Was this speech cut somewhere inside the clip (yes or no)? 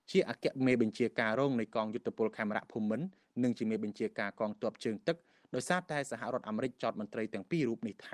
no